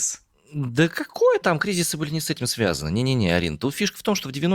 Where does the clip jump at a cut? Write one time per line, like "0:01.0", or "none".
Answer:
0:01.4